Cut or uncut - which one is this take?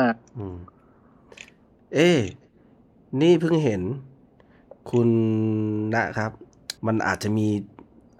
cut